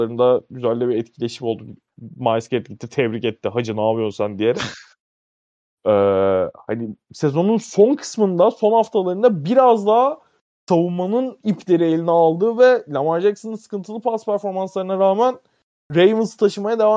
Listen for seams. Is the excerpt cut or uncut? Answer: uncut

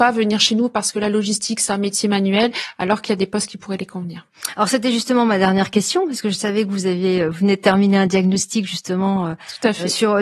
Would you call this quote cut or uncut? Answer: uncut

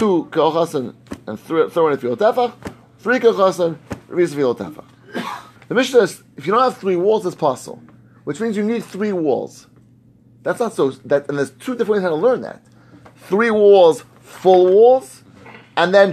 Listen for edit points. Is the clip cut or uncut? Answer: cut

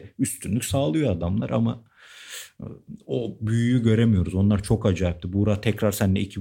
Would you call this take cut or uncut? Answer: uncut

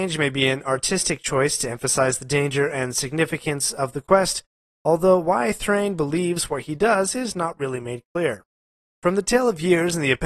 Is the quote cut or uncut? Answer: uncut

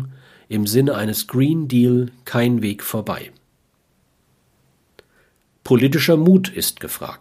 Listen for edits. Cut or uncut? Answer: uncut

